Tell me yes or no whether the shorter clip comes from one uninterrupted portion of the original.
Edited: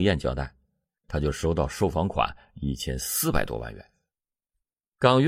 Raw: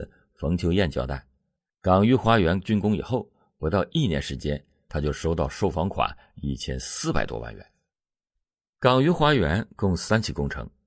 no